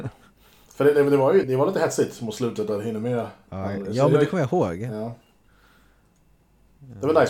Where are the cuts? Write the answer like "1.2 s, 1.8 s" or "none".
1.4 s

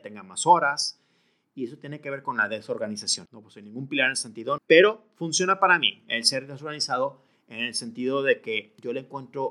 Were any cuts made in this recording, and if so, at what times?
3.3 s, 4.6 s

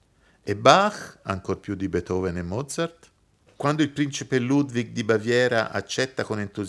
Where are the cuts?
3.5 s

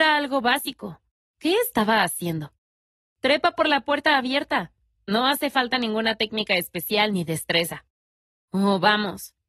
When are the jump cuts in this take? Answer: 1.3 s, 3.1 s

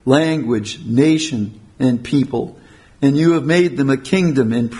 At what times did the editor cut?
none

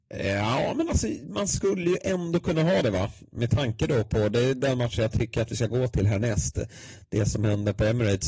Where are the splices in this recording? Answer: none

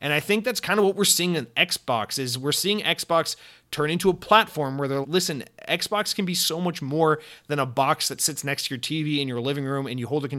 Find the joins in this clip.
5.0 s

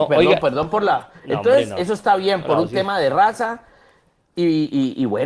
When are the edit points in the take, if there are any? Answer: none

